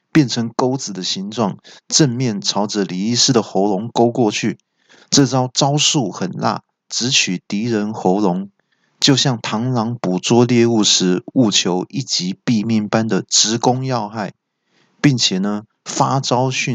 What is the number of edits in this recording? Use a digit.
0